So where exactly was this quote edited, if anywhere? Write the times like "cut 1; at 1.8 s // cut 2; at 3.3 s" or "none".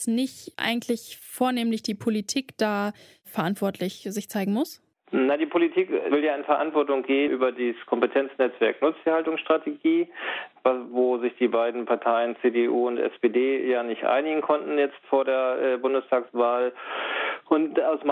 cut 1; at 7.3 s